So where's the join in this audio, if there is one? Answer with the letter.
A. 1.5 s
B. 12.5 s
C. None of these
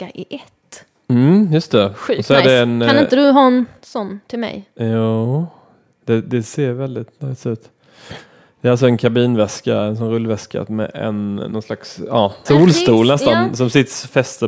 B